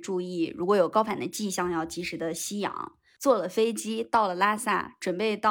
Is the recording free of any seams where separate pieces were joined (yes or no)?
no